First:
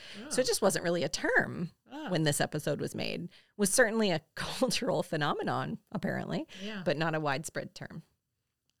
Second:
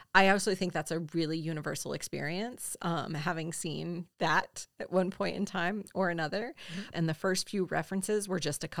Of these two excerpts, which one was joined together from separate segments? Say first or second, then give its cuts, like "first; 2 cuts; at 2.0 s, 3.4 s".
second; 2 cuts; at 4.1 s, 6.9 s